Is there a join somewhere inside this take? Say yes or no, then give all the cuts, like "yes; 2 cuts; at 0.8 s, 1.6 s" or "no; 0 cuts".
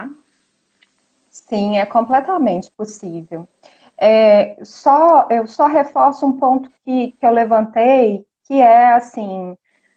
no; 0 cuts